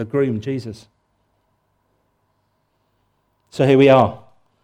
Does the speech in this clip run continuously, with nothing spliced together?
yes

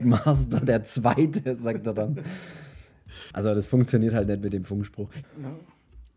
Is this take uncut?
no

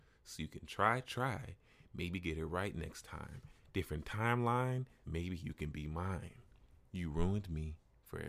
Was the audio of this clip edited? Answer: yes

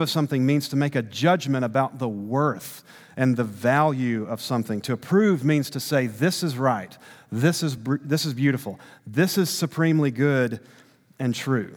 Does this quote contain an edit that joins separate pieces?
no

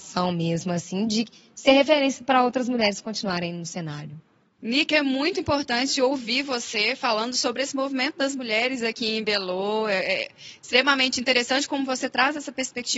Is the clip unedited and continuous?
yes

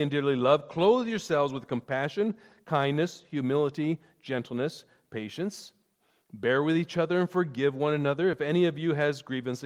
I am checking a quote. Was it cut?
no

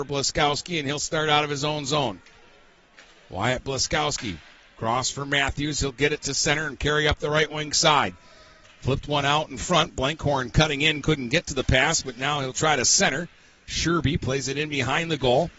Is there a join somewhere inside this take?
no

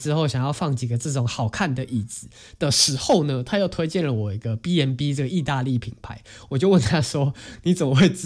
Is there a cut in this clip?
no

